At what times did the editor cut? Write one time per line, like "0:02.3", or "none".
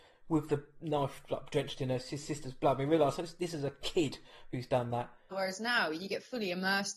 0:05.3

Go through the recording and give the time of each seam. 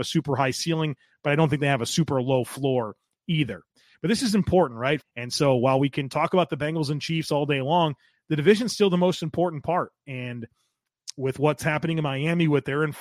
0:05.0

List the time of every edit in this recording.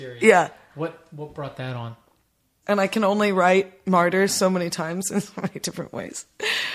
0:02.6

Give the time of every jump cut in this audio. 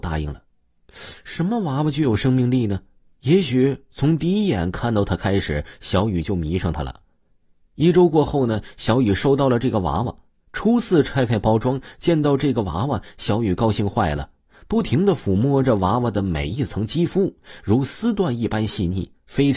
none

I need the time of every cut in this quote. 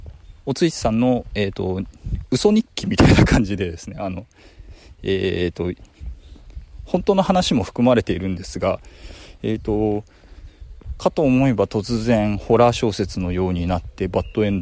none

